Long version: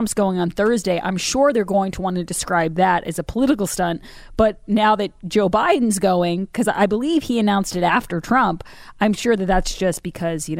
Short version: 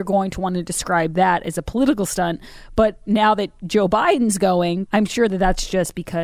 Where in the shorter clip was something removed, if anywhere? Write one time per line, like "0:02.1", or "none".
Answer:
0:04.9

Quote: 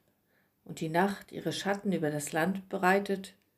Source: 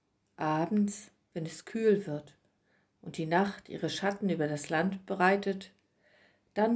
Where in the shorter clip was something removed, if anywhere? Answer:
none

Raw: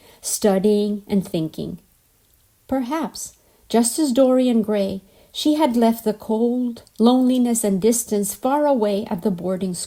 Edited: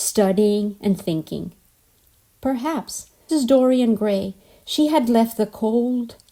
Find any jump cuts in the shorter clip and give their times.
0:03.3

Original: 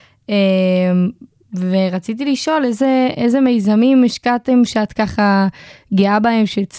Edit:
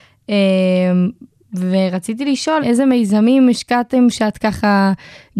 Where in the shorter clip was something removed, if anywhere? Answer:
0:02.6

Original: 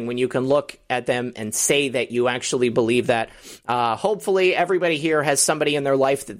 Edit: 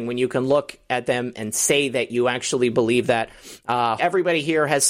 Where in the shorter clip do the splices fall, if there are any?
0:04.0

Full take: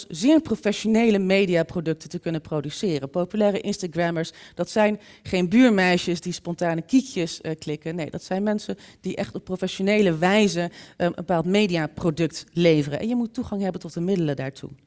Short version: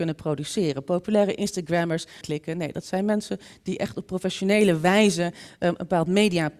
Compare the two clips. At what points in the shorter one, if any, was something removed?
0:02.2

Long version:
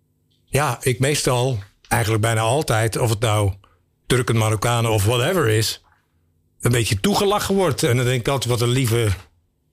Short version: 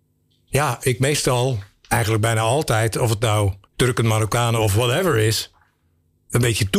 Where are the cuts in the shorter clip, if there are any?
0:03.6

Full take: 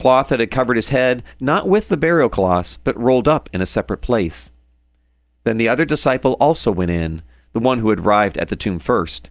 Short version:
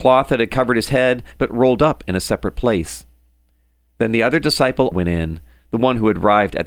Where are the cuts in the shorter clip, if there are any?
0:01.4
0:04.9

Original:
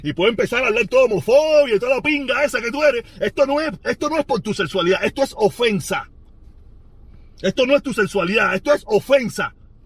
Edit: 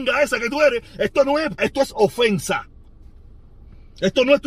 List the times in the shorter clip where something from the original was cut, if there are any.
0:01.6

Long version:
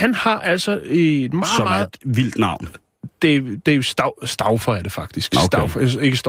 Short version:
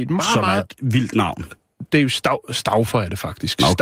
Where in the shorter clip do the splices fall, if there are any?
0:01.9

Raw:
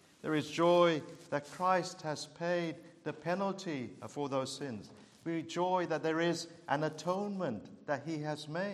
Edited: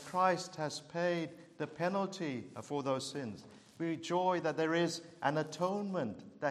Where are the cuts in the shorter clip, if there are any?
none

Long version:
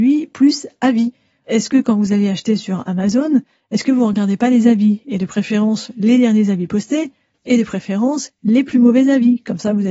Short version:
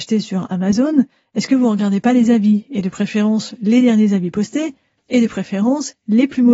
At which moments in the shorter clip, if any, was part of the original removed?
none

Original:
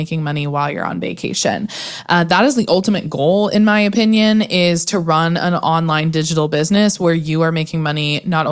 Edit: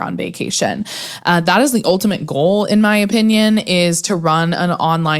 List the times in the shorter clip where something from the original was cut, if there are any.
none

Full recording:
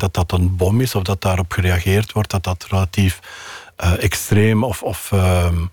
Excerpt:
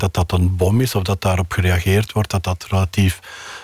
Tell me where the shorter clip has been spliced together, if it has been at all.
none

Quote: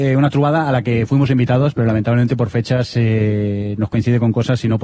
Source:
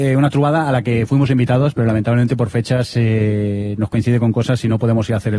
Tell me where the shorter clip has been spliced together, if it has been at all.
none

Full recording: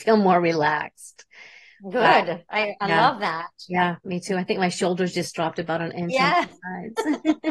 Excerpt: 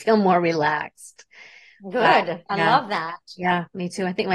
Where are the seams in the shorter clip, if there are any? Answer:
0:02.5

